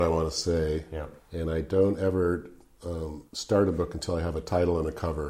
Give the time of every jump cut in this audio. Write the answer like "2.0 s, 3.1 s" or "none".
1.2 s, 3.3 s